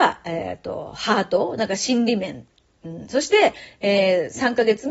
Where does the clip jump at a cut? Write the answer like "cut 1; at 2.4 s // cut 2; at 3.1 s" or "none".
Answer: none